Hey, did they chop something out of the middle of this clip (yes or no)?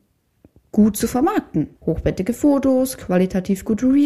yes